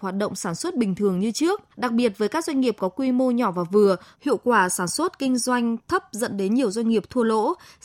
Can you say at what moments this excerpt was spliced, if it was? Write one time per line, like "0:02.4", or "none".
0:01.7
0:04.1